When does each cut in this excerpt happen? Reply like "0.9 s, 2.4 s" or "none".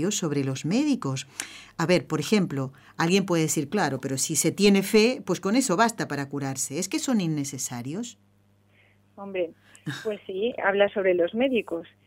10.6 s